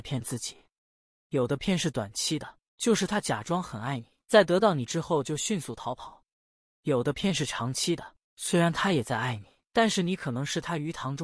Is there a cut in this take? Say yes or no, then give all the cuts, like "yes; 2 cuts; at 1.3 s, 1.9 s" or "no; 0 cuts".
no; 0 cuts